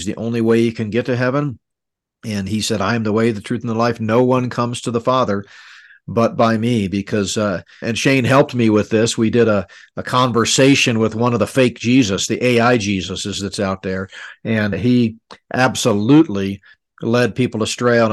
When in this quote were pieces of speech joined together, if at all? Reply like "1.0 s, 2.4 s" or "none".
7.8 s, 14.7 s

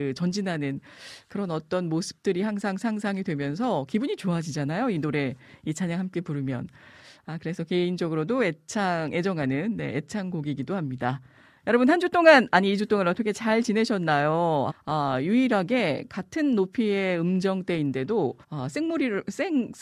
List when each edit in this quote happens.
14.7 s, 18.4 s

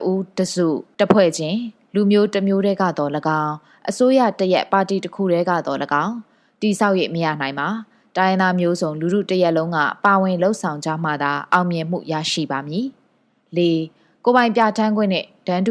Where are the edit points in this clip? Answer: none

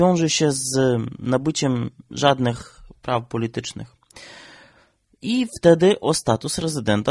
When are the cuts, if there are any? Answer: none

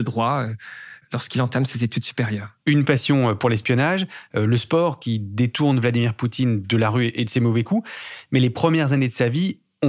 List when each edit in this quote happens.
none

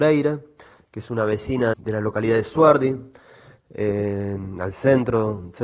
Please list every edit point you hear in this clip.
1.7 s

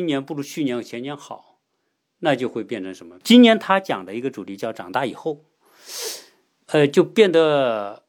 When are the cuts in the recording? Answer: 3.2 s, 6.5 s

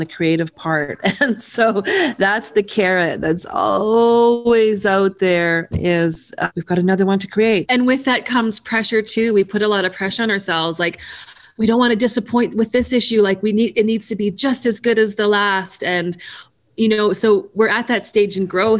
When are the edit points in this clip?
7.6 s

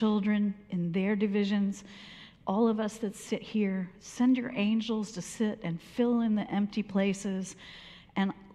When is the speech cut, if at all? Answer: none

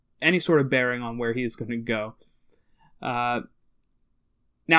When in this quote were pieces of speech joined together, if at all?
none

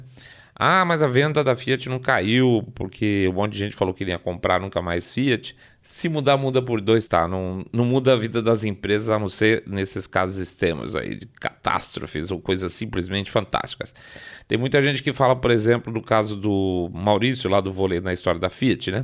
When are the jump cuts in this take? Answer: 5.7 s, 7.1 s

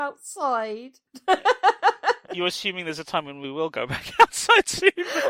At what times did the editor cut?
1.1 s, 2.3 s

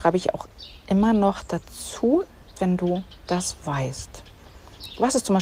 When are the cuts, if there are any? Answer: 2.5 s

